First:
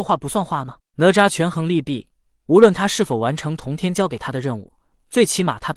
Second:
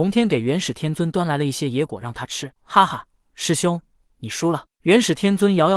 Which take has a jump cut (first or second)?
second